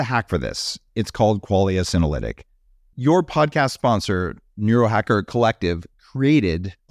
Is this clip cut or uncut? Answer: uncut